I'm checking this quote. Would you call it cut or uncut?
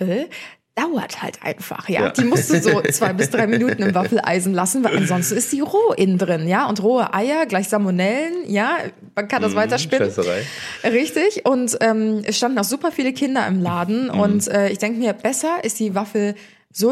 uncut